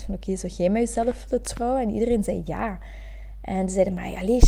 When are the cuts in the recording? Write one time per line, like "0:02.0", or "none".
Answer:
none